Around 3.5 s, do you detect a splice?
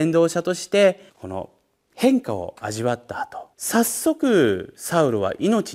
yes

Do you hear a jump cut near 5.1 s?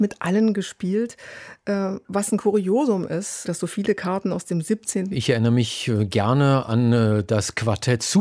yes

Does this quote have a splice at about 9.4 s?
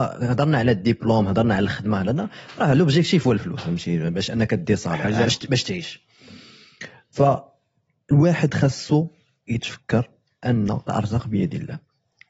no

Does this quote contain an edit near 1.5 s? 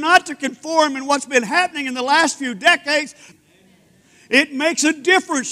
no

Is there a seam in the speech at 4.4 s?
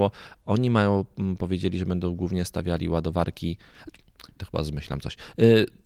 yes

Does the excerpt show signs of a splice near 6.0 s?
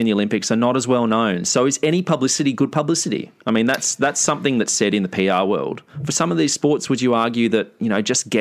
no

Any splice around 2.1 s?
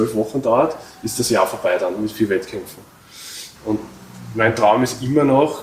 no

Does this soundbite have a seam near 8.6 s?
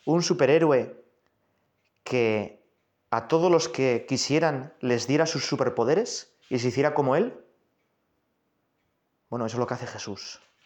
no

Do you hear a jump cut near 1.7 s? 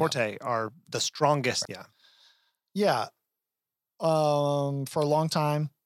yes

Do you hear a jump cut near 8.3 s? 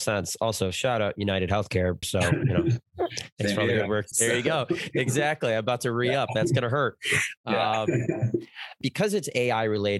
no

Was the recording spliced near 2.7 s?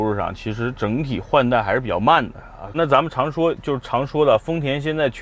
yes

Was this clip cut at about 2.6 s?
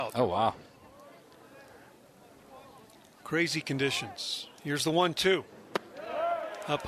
no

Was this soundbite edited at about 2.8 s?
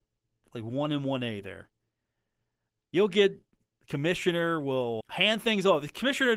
no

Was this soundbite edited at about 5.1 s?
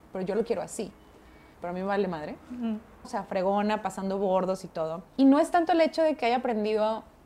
yes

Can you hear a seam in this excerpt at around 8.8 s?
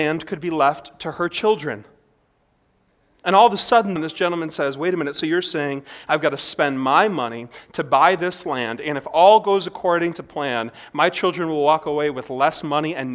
no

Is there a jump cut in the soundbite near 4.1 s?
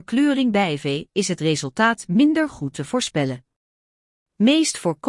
no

